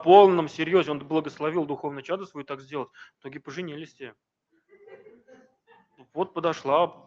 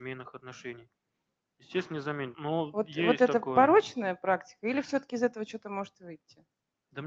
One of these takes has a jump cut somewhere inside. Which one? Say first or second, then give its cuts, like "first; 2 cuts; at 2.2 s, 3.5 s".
second; 1 cut; at 2.3 s